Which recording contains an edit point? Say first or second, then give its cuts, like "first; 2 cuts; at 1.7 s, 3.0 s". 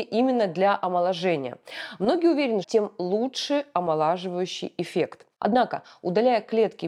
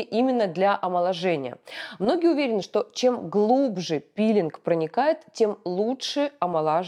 first; 1 cut; at 2.6 s